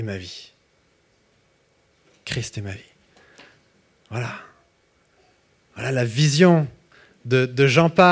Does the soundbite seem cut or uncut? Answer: uncut